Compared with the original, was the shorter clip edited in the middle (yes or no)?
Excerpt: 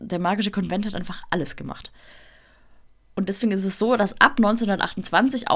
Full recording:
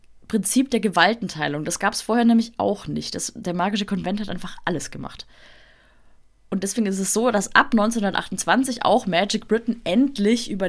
no